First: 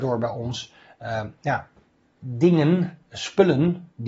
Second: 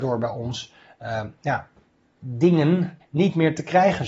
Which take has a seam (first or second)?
second